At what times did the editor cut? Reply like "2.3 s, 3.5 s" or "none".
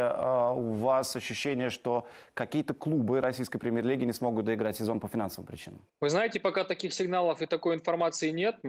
5.9 s